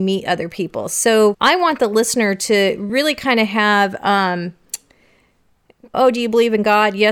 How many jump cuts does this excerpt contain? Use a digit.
2